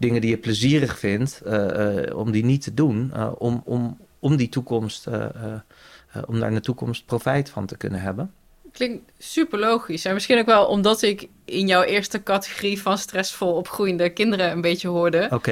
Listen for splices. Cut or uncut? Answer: uncut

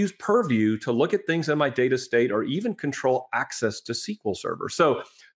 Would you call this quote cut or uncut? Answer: uncut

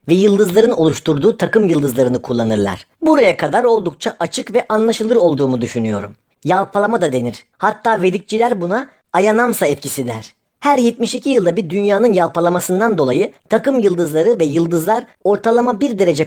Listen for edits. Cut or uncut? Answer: cut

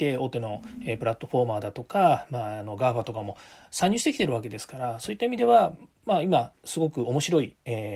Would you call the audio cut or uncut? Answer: uncut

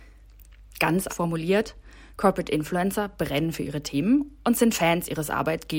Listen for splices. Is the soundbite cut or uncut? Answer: cut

